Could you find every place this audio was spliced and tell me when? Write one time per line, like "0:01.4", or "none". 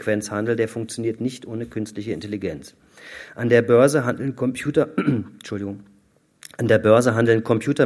none